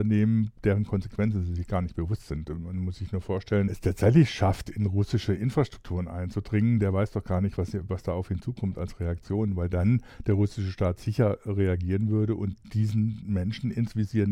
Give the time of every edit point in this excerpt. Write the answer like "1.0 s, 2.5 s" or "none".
3.7 s, 7.6 s